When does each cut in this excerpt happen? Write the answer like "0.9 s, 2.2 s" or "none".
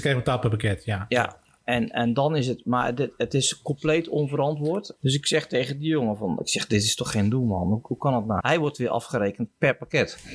5.0 s, 8.4 s